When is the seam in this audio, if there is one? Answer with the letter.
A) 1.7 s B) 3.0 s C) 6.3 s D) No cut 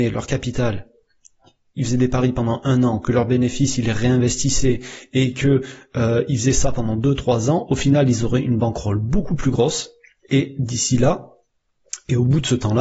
D